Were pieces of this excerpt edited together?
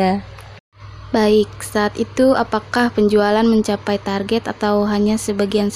no; 0 cuts

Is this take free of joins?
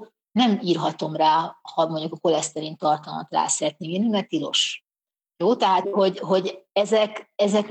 no; 1 cut; at 5.8 s

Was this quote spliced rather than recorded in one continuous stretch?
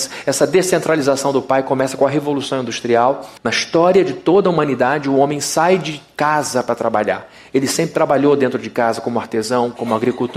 yes; 1 cut; at 3.4 s

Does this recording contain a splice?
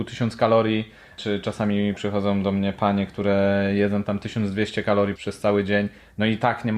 yes; 1 cut; at 5.2 s

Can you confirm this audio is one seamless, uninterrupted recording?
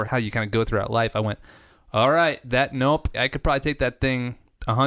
no; 1 cut; at 3.1 s

